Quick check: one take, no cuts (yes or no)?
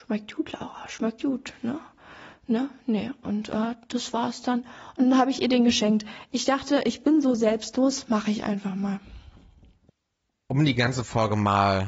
yes